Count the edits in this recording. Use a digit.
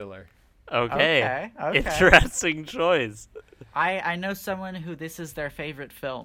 0